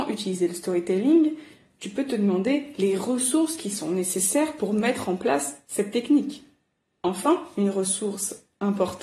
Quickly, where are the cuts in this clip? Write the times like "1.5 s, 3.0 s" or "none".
7.0 s